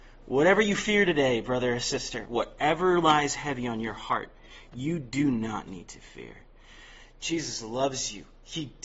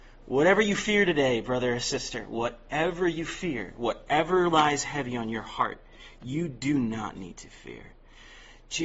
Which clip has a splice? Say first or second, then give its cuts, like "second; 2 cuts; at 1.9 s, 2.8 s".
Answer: first; 1 cut; at 2.2 s